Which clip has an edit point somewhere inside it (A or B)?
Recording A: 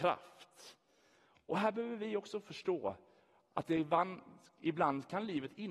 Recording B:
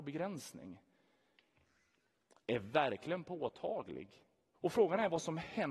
B